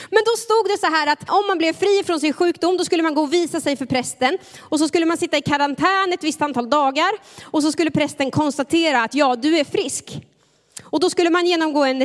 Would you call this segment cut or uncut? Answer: cut